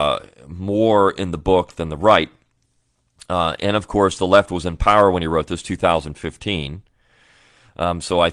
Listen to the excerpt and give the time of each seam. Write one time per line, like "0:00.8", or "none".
none

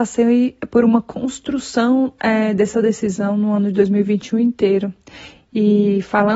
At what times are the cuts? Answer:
0:05.3

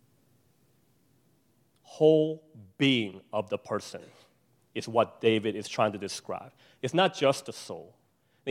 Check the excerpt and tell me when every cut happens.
none

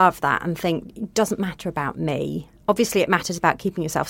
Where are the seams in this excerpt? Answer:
none

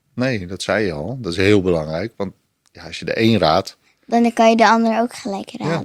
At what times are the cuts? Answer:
none

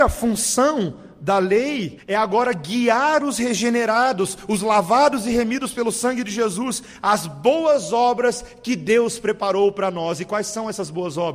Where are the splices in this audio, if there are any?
0:02.0

